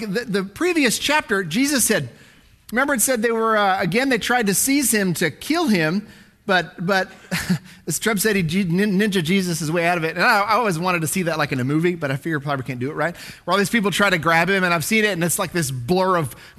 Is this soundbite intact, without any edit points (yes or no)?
yes